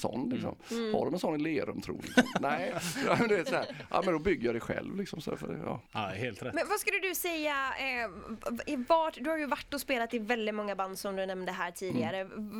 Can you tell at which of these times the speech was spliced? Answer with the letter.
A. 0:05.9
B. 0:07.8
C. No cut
A